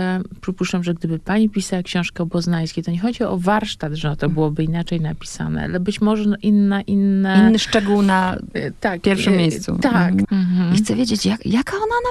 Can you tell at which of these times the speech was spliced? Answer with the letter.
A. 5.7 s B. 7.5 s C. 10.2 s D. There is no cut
C